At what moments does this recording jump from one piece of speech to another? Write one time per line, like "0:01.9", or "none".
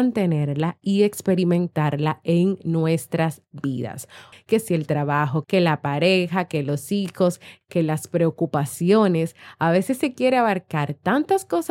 0:04.3
0:05.4
0:07.6